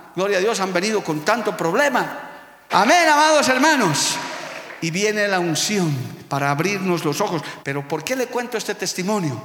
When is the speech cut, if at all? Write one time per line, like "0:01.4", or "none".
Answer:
0:02.7
0:07.6